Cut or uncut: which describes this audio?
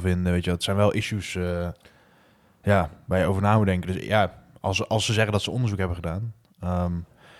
uncut